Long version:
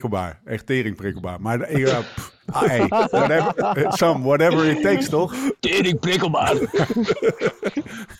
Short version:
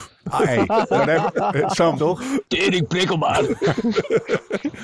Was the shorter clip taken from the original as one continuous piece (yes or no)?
no